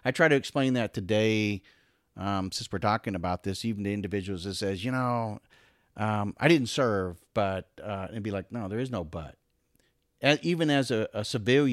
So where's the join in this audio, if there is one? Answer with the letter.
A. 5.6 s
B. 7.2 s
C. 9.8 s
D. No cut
D